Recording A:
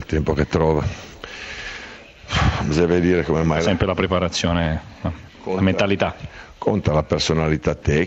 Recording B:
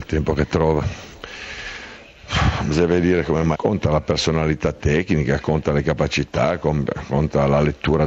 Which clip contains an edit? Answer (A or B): B